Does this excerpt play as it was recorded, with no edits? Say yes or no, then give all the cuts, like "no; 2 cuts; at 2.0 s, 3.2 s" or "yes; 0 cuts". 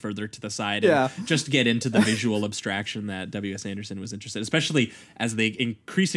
yes; 0 cuts